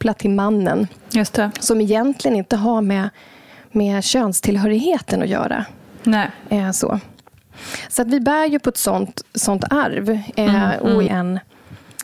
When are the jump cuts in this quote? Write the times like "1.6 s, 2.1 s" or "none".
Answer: 11.1 s

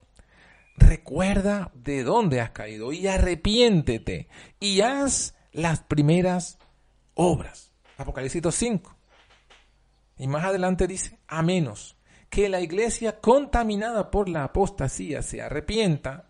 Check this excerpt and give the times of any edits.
1.7 s

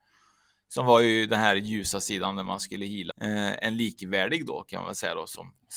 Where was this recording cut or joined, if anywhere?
3.1 s

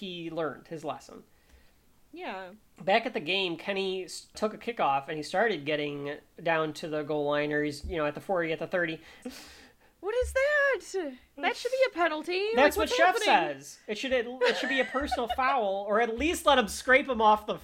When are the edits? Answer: 9.2 s

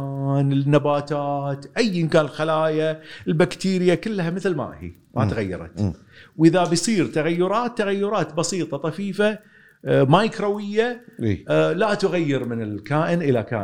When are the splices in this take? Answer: none

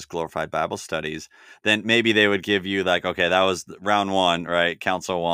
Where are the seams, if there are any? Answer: none

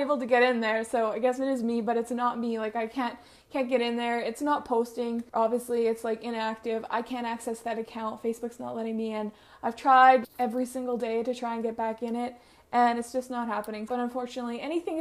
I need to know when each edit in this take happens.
5.3 s, 10.2 s, 13.9 s

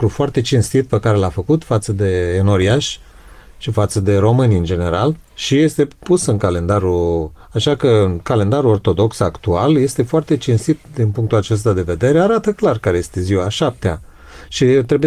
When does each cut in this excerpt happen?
none

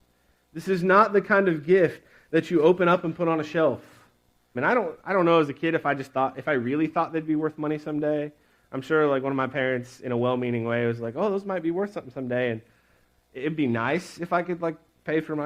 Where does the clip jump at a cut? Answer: 4.5 s

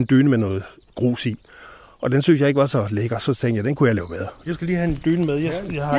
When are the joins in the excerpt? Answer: 4.5 s

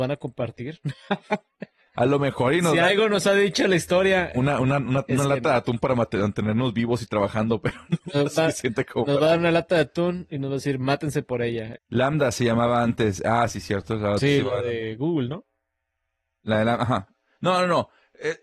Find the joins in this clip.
8.3 s, 11.7 s

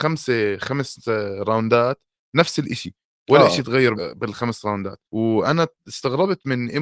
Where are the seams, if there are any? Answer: 4.0 s, 5.0 s

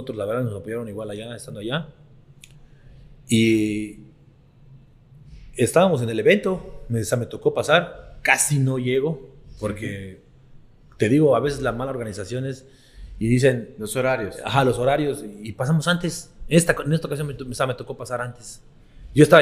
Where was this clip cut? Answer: none

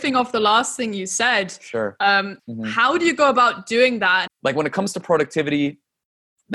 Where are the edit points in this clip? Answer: 2.4 s, 4.3 s

